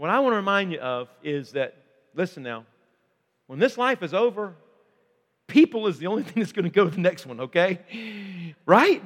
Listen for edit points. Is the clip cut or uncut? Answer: uncut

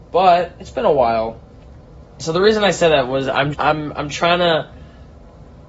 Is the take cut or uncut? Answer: cut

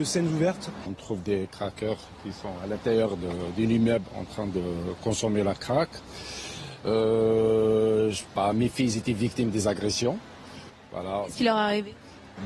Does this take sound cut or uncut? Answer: uncut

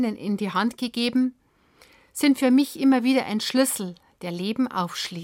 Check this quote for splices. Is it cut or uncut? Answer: uncut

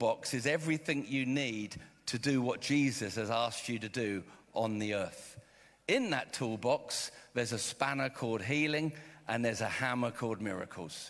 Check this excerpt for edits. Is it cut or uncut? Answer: uncut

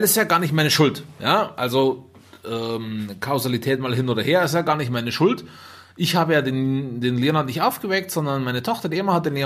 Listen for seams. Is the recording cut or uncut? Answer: uncut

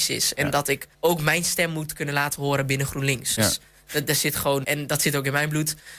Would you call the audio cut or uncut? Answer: cut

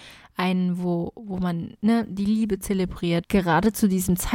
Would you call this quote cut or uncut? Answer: cut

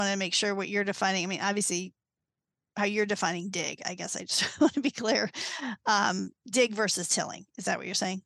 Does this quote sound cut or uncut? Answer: uncut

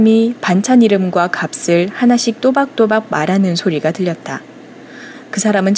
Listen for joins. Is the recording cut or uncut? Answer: uncut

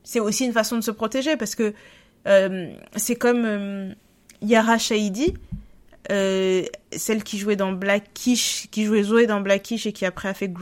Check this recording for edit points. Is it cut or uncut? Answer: uncut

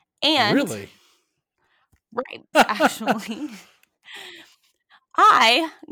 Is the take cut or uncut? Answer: cut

